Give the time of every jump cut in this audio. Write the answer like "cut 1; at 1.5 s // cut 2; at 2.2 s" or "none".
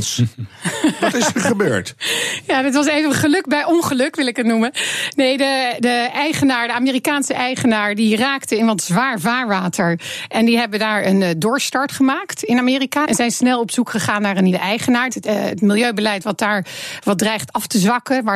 cut 1; at 13.0 s // cut 2; at 15.1 s